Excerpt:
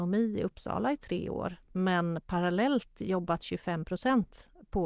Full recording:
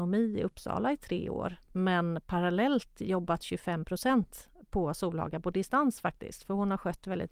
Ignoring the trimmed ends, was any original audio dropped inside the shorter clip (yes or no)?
no